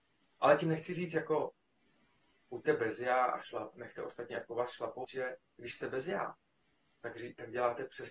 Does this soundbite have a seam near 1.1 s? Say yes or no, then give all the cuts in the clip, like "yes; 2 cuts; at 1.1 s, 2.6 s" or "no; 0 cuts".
no; 1 cut; at 5.0 s